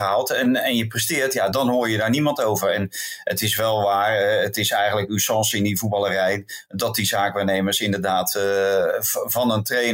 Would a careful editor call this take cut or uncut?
cut